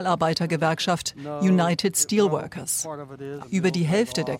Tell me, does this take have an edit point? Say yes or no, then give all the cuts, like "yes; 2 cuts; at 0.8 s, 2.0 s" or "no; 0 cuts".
yes; 1 cut; at 3.4 s